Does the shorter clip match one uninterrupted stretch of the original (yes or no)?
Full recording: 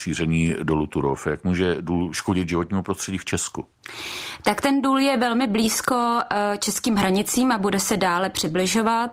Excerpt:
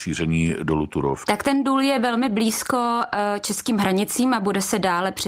no